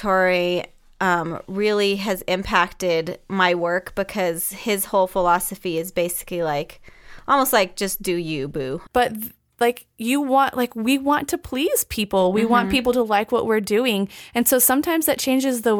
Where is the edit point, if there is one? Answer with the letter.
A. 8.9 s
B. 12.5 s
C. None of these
A